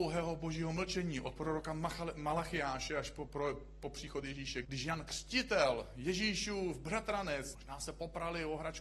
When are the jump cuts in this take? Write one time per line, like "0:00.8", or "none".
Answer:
0:03.3
0:04.6
0:07.5